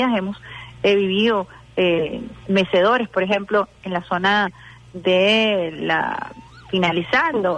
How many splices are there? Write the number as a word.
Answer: one